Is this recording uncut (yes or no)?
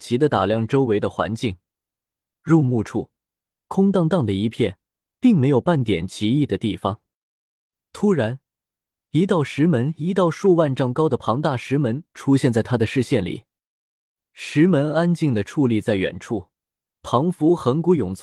yes